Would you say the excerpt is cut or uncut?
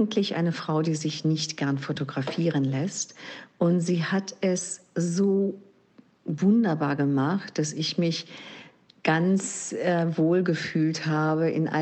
uncut